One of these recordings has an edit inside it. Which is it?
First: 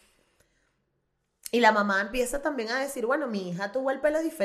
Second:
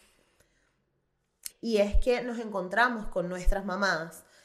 second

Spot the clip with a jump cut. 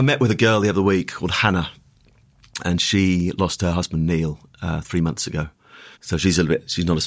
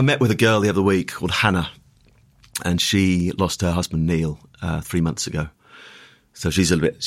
first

